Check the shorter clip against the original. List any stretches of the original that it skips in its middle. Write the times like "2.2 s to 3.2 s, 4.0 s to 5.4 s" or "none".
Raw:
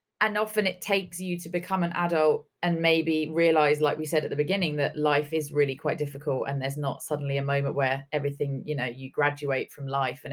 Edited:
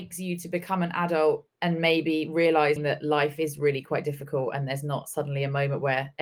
3.8 s to 4.7 s